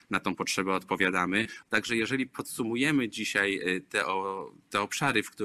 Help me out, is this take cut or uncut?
cut